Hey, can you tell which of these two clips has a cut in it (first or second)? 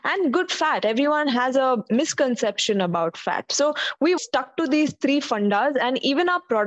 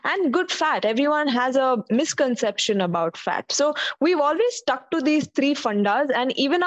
first